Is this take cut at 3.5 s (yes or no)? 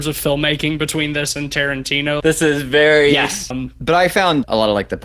yes